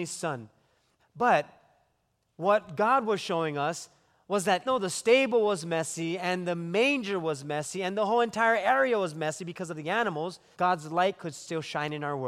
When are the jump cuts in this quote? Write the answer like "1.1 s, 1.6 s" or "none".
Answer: 1.0 s, 4.7 s, 10.5 s